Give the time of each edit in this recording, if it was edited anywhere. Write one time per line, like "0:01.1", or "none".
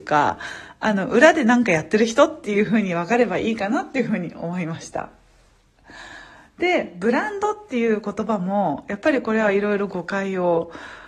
none